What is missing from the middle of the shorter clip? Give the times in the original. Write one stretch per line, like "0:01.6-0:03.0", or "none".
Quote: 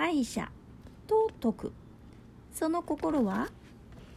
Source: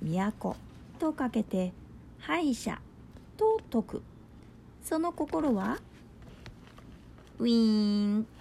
none